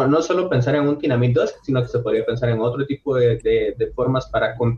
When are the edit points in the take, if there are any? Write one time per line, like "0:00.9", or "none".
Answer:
none